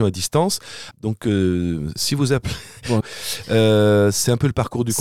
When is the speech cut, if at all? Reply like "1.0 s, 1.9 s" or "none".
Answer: 0.9 s, 3.0 s